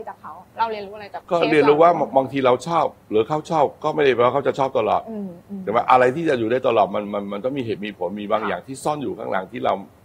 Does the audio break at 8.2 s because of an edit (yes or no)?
no